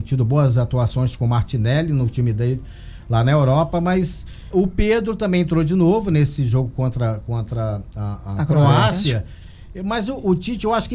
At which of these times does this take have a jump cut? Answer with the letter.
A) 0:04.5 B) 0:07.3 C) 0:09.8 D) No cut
A